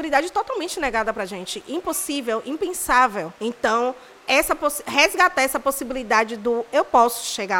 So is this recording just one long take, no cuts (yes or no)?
no